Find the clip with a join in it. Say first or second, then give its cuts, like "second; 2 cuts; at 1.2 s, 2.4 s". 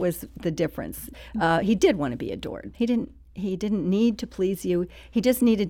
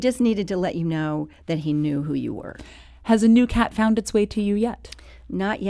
first; 1 cut; at 2.7 s